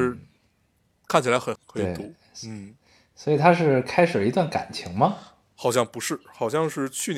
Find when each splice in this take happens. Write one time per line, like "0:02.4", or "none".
0:01.6